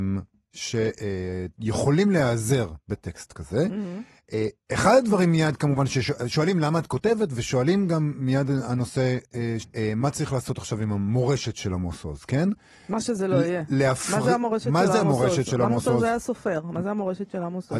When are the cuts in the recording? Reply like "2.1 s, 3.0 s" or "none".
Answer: 9.6 s